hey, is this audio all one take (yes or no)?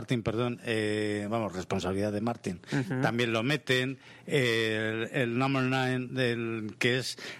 yes